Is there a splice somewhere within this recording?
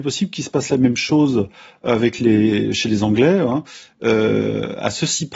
no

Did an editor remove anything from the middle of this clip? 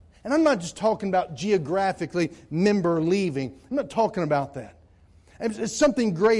no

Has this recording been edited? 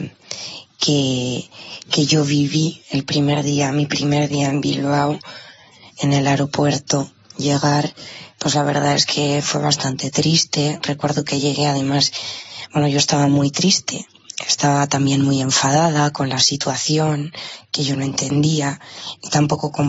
no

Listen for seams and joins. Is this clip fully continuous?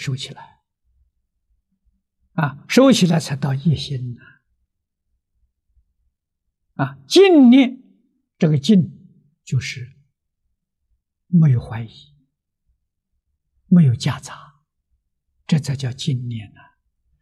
yes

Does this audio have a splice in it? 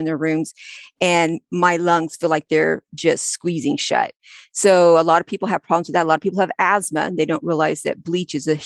no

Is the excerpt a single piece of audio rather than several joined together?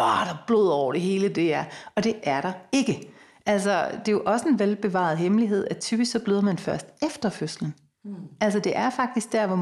yes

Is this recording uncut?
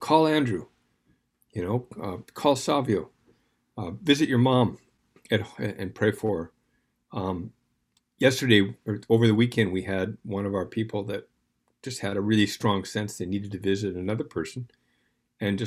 yes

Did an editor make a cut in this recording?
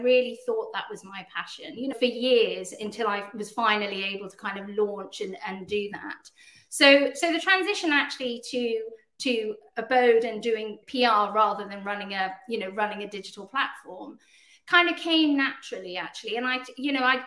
yes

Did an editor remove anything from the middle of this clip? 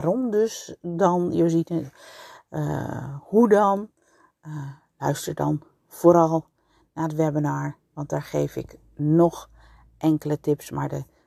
no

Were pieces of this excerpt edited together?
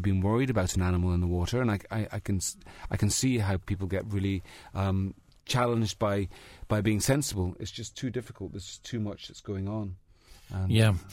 no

